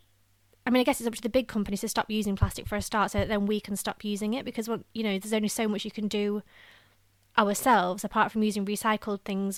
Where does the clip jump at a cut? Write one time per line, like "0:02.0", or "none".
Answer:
none